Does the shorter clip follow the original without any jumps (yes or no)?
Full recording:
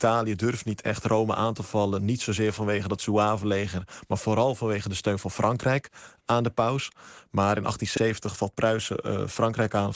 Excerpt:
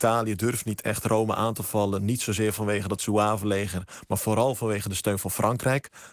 yes